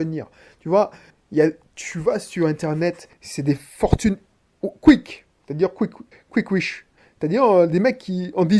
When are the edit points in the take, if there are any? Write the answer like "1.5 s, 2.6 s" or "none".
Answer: 3.1 s